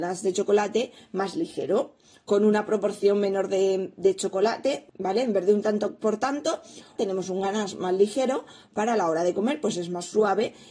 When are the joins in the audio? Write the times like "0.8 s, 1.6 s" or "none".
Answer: 4.9 s, 7.0 s